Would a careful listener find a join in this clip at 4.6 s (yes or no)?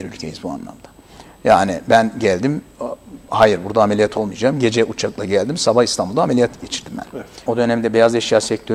no